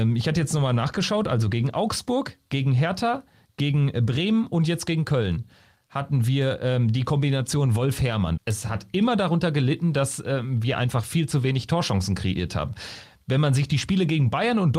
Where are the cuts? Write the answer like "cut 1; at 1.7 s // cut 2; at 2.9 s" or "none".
cut 1; at 8.4 s